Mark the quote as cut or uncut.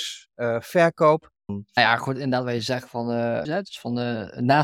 cut